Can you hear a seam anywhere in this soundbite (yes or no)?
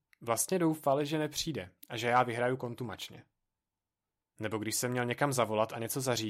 no